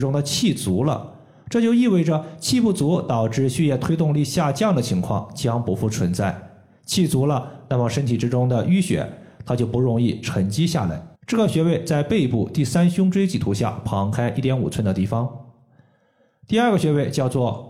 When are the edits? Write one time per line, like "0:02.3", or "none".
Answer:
0:11.2